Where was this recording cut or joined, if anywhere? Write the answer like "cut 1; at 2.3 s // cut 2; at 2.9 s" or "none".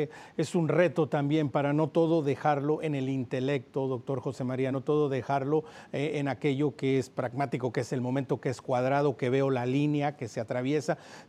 none